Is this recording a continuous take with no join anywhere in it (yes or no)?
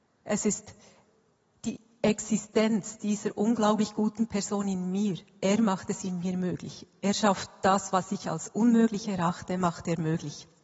yes